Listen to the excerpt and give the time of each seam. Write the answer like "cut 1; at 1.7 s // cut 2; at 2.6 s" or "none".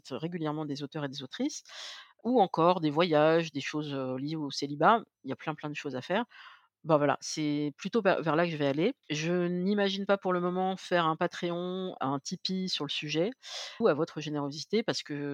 cut 1; at 9.0 s // cut 2; at 12.0 s // cut 3; at 13.8 s